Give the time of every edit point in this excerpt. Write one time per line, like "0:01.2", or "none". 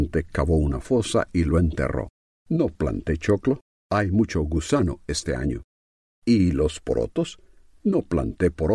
0:02.3